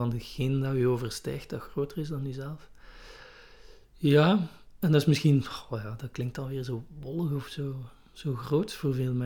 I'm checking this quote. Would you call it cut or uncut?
uncut